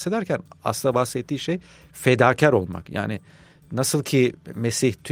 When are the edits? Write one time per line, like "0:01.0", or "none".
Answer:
none